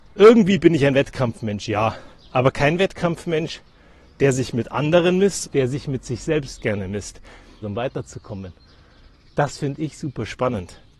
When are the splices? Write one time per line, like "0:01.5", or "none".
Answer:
0:05.4
0:07.6